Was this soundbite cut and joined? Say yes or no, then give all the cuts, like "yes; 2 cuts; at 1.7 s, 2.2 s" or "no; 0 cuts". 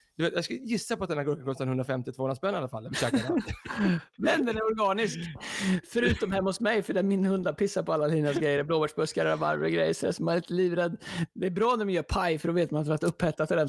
no; 0 cuts